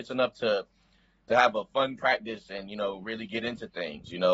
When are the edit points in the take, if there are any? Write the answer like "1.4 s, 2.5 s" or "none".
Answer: none